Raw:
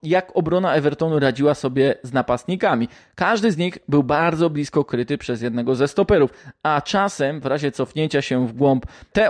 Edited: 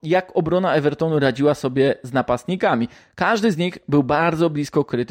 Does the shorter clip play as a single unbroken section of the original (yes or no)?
yes